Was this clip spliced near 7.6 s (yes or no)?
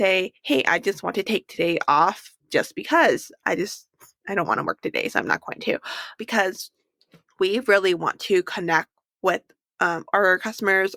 no